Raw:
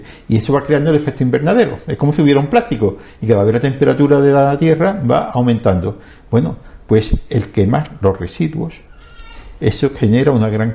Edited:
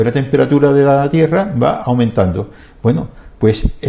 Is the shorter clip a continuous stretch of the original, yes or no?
yes